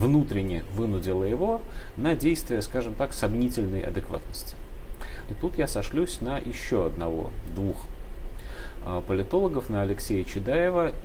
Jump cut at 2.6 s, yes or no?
no